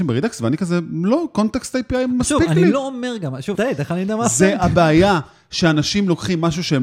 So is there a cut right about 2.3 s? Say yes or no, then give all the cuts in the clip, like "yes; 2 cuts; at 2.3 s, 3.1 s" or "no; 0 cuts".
no; 1 cut; at 3.5 s